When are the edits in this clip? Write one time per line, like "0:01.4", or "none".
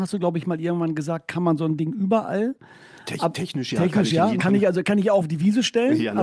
0:04.4